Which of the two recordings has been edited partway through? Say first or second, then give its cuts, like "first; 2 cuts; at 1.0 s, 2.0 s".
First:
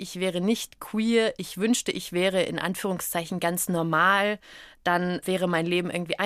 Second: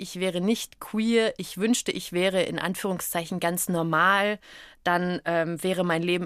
first; 1 cut; at 5.2 s